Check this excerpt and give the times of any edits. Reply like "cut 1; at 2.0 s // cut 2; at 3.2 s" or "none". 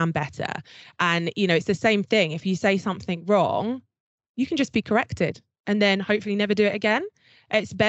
none